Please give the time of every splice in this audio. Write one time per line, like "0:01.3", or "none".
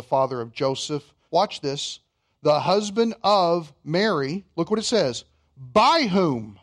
0:01.3